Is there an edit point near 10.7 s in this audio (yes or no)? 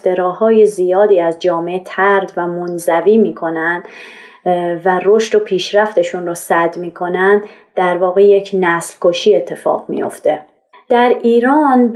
yes